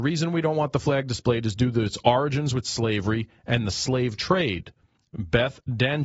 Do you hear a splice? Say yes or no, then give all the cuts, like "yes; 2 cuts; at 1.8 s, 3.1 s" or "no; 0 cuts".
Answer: no; 0 cuts